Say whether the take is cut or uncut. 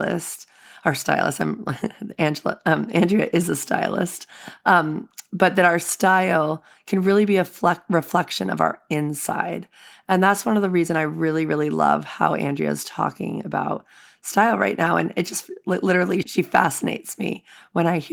cut